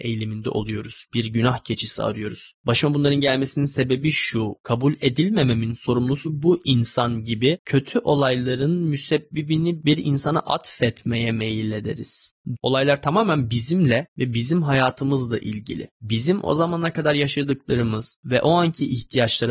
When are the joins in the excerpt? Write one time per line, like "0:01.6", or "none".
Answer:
0:12.6